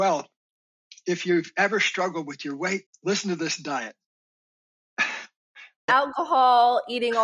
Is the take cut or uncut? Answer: cut